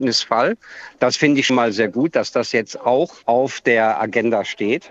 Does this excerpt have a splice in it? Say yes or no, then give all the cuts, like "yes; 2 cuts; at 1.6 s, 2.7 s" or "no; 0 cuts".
yes; 1 cut; at 1.5 s